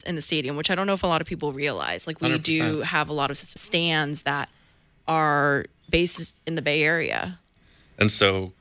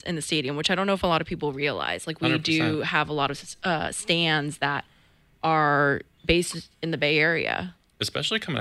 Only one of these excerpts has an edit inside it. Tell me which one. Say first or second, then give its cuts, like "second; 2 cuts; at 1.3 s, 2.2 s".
first; 2 cuts; at 3.6 s, 7.6 s